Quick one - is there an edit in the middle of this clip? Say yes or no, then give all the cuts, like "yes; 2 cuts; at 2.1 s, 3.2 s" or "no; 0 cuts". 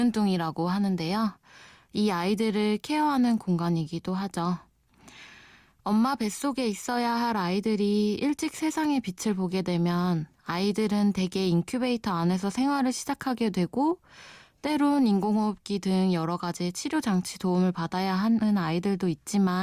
no; 0 cuts